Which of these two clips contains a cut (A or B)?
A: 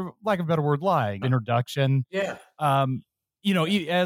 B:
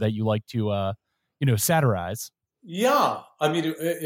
A